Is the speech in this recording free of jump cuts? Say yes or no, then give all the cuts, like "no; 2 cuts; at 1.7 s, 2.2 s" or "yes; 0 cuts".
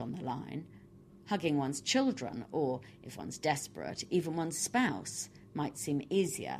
yes; 0 cuts